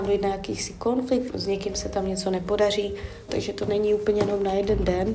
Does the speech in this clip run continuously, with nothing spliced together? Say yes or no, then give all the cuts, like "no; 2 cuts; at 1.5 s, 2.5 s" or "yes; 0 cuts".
no; 2 cuts; at 1.3 s, 3.3 s